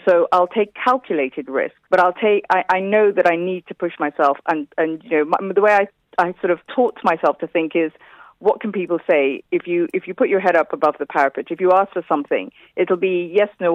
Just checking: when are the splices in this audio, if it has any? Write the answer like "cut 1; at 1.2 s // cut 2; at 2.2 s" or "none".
cut 1; at 1.8 s